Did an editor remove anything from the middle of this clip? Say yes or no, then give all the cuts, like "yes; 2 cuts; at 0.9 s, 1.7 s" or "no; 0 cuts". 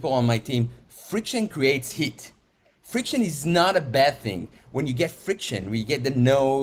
no; 0 cuts